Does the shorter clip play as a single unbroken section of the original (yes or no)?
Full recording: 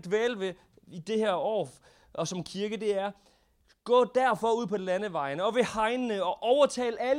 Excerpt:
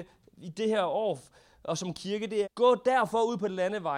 no